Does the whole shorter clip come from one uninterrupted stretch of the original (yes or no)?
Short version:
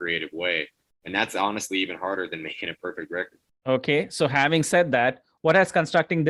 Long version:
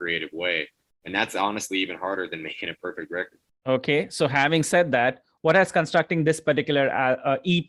yes